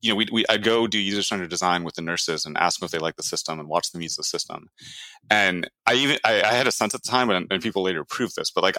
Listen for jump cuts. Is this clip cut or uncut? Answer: uncut